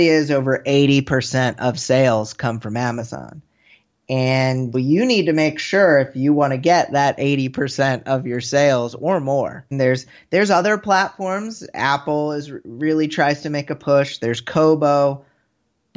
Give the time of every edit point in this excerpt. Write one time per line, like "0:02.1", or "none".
0:04.7
0:09.7